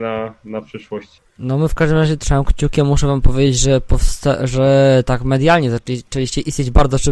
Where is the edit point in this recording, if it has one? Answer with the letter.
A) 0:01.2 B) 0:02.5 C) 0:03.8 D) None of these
A